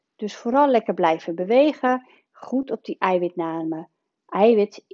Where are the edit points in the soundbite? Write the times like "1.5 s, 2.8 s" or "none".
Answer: none